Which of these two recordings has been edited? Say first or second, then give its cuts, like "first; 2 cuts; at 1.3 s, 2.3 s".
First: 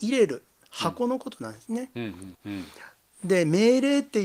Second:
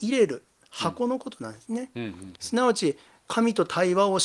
first; 1 cut; at 2.3 s